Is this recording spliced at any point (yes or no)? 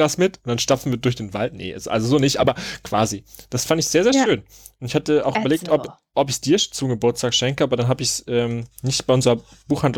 no